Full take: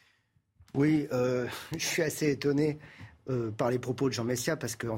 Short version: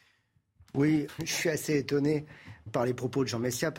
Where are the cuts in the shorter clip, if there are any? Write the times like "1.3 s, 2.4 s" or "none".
1.1 s, 2.7 s